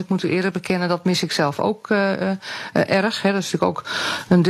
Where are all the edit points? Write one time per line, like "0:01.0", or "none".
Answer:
none